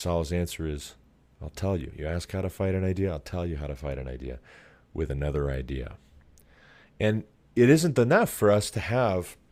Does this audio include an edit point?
no; 0 cuts

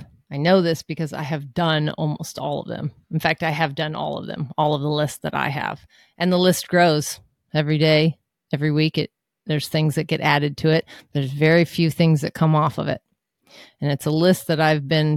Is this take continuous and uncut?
yes; 0 cuts

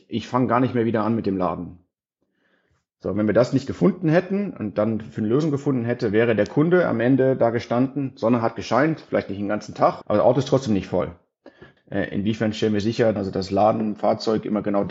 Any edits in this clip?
yes; 3 cuts; at 10.0 s, 11.8 s, 13.2 s

